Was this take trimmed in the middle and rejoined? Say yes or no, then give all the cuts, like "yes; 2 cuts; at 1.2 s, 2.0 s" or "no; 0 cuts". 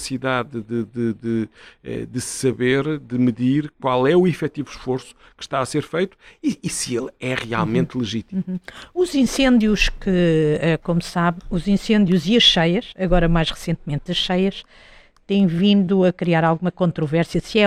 no; 0 cuts